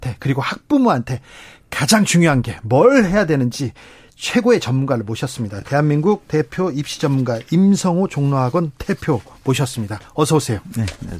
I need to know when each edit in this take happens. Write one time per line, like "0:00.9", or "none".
none